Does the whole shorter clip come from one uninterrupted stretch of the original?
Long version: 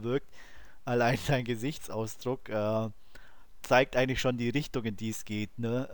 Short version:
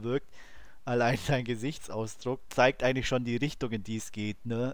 no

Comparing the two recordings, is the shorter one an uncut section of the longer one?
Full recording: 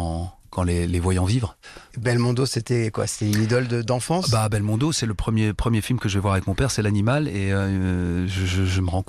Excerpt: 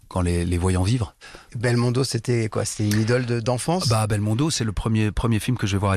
yes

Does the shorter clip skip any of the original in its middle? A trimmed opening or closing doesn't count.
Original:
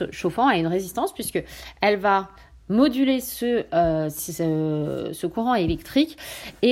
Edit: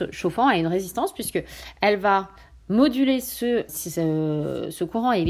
yes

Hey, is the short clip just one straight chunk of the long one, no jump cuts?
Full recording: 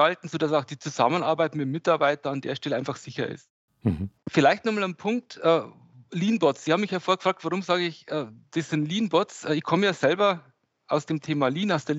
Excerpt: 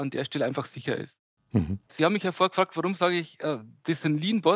no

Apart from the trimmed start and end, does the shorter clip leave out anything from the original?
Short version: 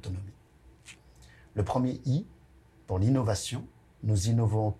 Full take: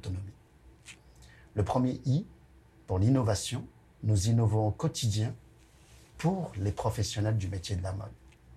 no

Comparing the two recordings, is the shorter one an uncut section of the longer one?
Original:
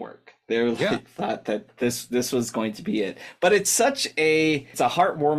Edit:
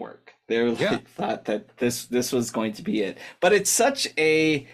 yes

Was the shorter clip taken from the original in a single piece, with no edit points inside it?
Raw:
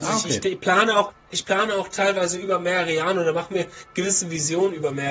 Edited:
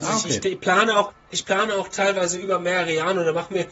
yes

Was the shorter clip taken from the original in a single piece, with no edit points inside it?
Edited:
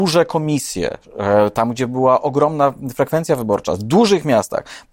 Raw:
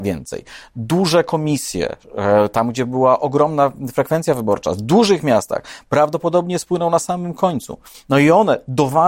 yes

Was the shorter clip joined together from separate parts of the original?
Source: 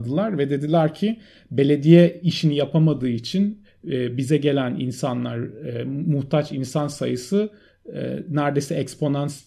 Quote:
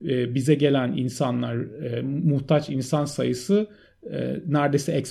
no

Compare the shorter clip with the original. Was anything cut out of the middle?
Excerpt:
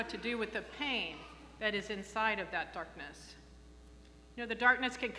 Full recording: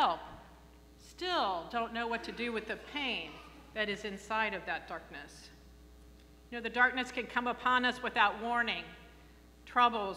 no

